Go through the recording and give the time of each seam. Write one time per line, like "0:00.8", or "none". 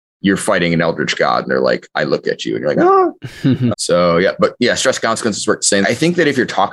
0:03.7
0:05.8